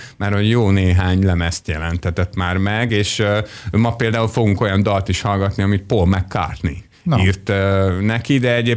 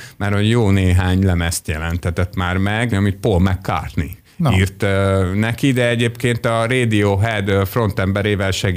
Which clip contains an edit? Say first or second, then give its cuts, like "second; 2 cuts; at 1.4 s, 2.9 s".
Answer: second; 1 cut; at 2.9 s